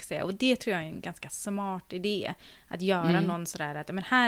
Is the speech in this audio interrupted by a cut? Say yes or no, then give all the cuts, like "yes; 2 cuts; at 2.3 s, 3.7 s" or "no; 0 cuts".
no; 0 cuts